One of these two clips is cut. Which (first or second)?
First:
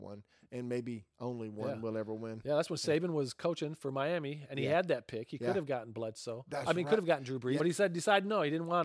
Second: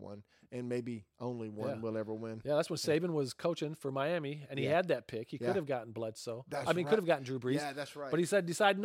first